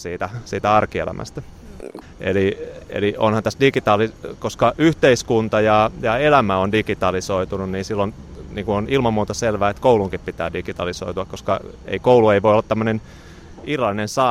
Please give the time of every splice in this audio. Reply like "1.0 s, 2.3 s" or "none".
2.0 s